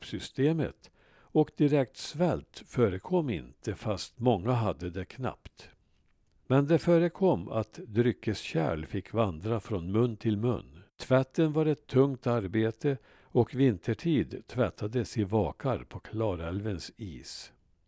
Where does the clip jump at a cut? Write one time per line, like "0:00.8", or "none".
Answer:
0:06.4
0:10.9